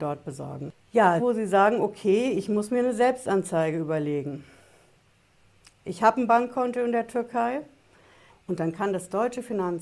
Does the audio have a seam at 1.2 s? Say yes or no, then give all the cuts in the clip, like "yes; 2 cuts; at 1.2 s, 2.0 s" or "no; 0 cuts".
yes; 2 cuts; at 1.2 s, 8.3 s